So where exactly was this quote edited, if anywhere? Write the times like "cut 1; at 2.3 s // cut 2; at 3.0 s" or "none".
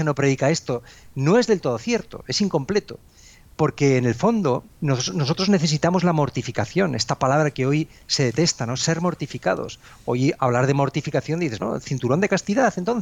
cut 1; at 4.7 s // cut 2; at 11.6 s